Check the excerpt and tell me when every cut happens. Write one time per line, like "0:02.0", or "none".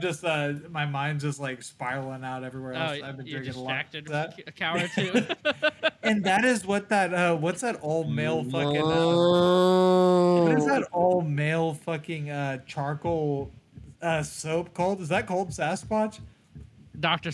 0:04.1